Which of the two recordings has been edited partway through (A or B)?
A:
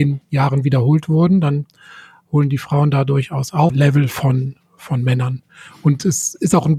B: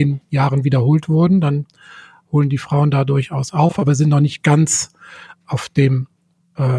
A